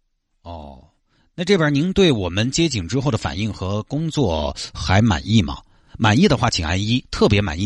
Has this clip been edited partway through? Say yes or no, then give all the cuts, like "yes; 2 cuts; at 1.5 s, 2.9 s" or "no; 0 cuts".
no; 0 cuts